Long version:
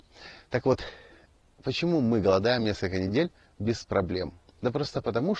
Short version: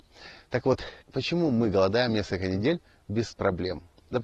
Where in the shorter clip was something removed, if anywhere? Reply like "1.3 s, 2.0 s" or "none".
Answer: 1.0 s

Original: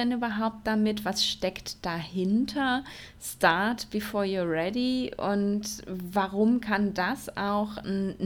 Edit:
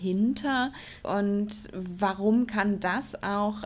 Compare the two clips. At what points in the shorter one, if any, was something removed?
1.0 s

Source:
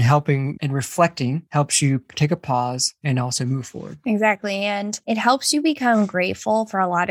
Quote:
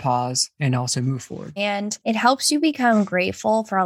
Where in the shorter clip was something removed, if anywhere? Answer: 1.6 s

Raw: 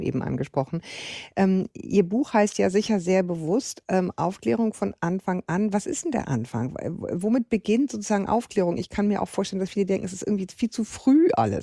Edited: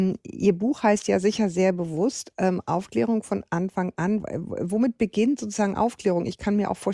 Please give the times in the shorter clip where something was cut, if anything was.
4.2 s

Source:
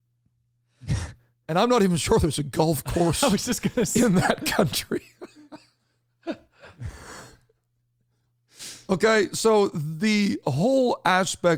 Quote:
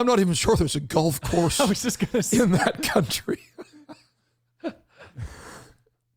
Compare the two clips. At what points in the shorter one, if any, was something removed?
none

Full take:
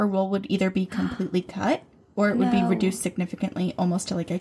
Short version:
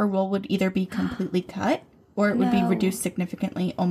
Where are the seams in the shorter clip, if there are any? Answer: none

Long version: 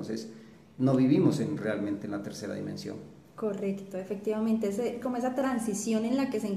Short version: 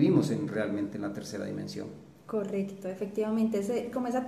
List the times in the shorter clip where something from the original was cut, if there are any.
none

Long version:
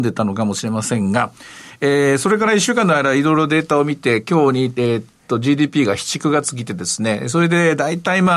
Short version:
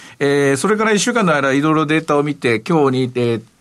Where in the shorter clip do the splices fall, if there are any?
none

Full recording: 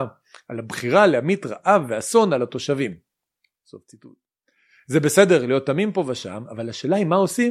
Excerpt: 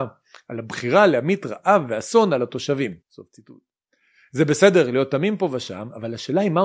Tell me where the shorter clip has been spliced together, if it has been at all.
3.0 s

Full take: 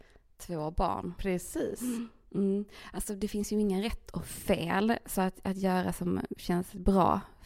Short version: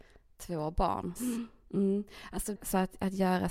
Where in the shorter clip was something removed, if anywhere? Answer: 1.2 s, 2.6 s

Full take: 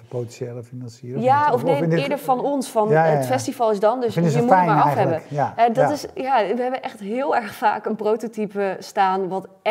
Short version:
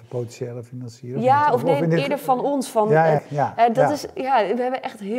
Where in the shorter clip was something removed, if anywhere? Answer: 3.2 s

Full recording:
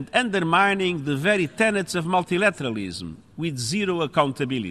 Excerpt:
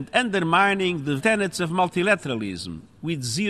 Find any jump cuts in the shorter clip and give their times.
1.2 s

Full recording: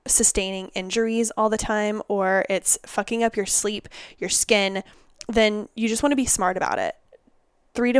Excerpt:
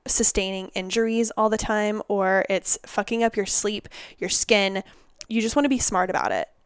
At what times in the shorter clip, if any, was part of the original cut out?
5.3 s

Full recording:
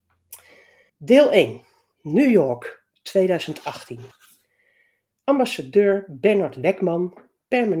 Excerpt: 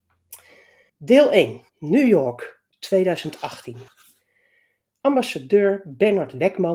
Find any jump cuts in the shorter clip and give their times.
1.7 s

